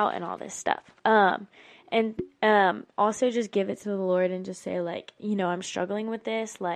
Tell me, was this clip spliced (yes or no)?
yes